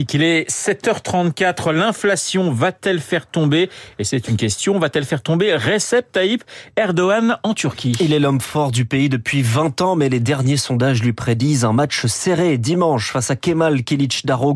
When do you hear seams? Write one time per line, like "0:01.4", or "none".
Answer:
none